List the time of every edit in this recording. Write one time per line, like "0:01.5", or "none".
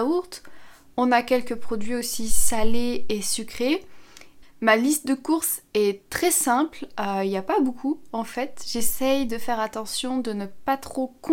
0:04.4